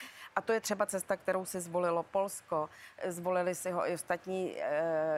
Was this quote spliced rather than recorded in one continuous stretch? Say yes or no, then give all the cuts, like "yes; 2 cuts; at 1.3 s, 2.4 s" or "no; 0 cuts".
no; 0 cuts